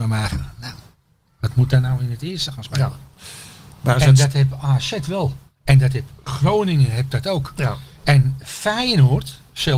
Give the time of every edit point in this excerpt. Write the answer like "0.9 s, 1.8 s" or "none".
none